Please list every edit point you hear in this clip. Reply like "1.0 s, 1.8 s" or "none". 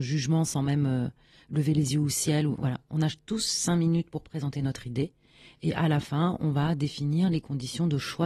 none